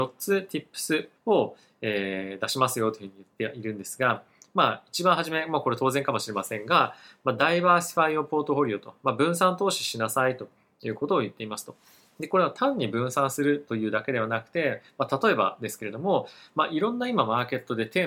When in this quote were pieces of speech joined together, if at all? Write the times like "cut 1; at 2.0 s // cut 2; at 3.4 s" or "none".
cut 1; at 1.2 s